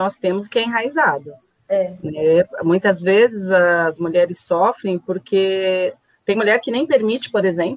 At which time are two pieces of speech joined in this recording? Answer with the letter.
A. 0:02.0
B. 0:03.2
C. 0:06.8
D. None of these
D